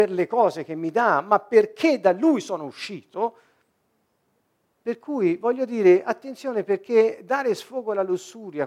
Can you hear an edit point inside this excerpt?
yes; 1 cut; at 4.8 s

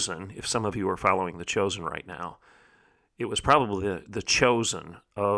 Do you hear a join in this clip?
no; 0 cuts

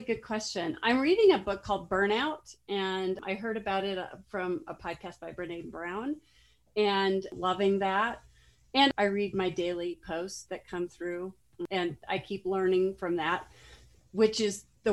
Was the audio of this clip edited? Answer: no; 0 cuts

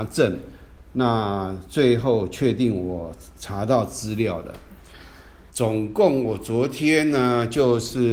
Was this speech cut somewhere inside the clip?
yes; 1 cut; at 5.5 s

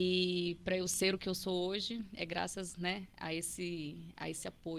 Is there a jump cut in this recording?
no; 0 cuts

